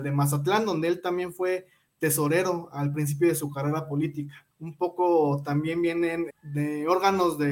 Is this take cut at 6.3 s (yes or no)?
yes